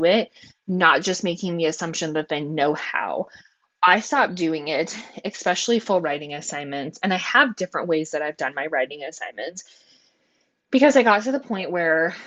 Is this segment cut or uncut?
uncut